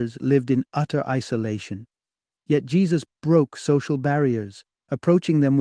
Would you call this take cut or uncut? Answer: uncut